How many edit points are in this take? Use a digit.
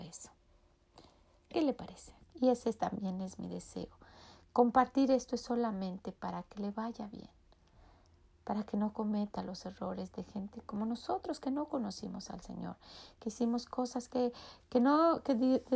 1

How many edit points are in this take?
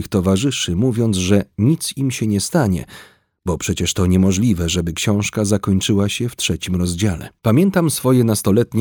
1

